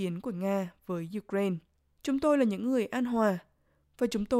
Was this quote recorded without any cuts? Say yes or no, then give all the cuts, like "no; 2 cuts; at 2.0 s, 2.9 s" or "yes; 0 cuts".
no; 1 cut; at 2.0 s